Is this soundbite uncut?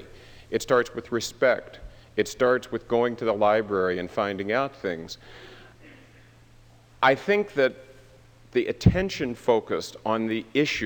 yes; 0 cuts

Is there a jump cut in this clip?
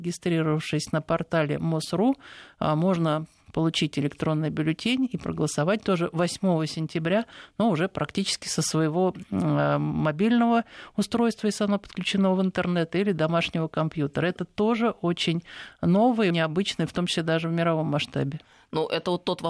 yes; 1 cut; at 16.3 s

